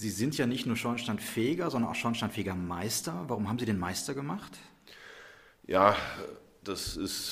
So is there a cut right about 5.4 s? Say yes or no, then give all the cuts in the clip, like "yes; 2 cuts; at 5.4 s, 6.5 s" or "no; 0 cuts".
no; 0 cuts